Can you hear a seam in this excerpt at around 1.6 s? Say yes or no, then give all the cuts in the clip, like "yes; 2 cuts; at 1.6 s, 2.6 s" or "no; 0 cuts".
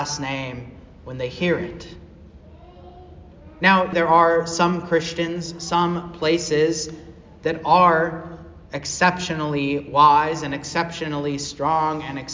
no; 1 cut; at 3.9 s